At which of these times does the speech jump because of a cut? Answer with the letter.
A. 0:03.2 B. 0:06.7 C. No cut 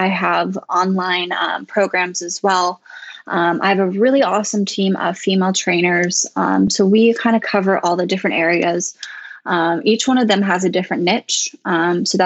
C